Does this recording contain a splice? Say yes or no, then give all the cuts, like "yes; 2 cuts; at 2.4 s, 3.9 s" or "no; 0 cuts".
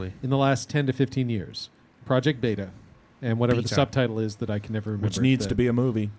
no; 0 cuts